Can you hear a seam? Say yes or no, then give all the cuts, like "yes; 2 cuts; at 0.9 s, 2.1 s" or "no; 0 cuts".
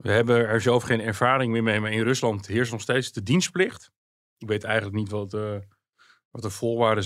no; 0 cuts